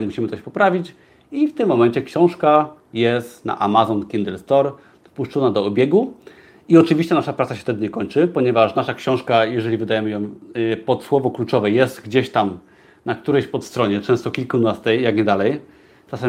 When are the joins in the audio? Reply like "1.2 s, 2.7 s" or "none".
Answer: none